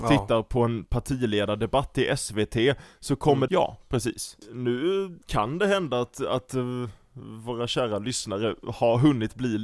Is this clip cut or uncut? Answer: cut